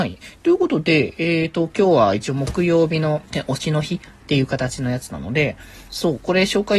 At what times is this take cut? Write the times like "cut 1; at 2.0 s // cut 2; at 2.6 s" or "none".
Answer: cut 1; at 3.3 s